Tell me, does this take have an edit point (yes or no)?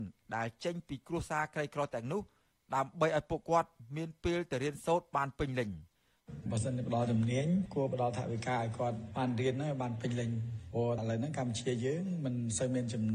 no